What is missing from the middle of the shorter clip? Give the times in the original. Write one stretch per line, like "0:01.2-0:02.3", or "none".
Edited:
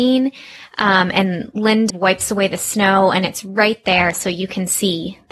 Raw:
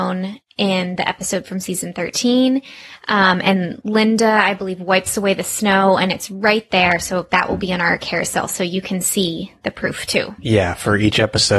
0:04.2-0:04.8
0:07.0-0:08.5